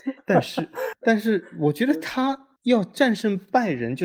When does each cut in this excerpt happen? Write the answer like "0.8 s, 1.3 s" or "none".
none